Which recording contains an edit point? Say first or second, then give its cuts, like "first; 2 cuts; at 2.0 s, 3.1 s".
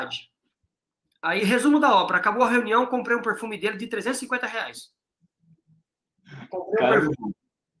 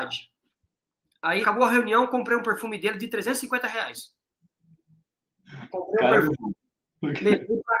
second; 1 cut; at 1.4 s